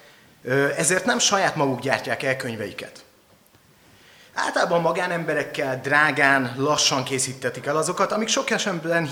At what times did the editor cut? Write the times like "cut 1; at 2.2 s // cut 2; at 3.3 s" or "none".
none

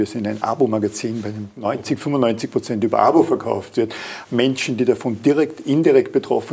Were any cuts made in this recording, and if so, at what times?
cut 1; at 4.3 s

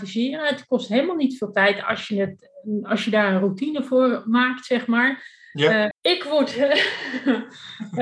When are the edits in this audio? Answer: cut 1; at 5.9 s

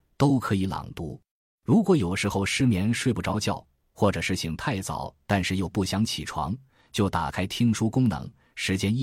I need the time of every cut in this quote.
cut 1; at 1.5 s

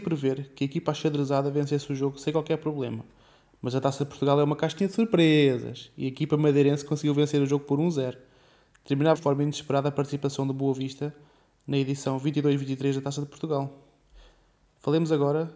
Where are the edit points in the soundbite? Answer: cut 1; at 9.1 s

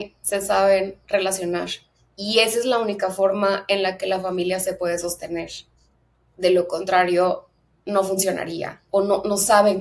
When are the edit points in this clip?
none

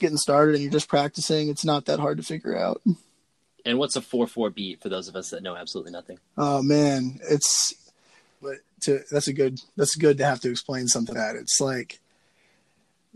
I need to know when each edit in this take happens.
cut 1; at 8.4 s // cut 2; at 11.1 s

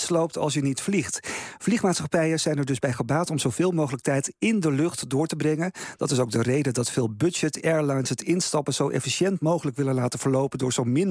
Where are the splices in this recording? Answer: none

